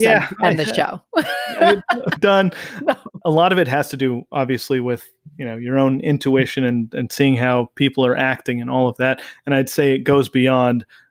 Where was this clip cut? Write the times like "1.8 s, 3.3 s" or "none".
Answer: 2.2 s